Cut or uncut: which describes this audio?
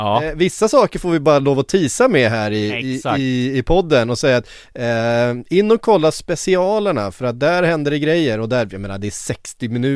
uncut